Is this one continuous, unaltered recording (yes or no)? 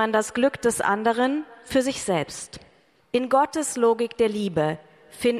no